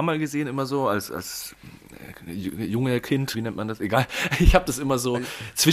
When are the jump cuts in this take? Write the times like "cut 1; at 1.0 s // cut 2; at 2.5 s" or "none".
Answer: cut 1; at 3.3 s

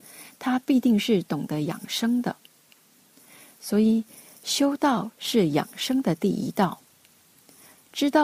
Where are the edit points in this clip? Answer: none

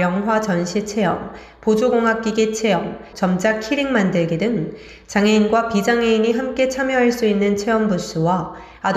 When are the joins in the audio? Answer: cut 1; at 3.1 s

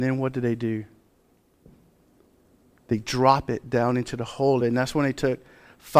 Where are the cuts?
cut 1; at 4.6 s

